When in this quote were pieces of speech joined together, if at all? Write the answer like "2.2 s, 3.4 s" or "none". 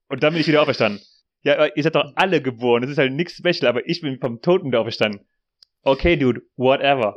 1.3 s